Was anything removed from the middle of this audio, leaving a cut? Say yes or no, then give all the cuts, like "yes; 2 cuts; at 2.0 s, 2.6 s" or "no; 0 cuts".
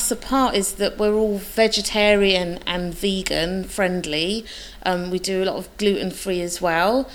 no; 0 cuts